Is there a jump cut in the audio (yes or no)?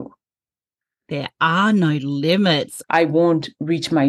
yes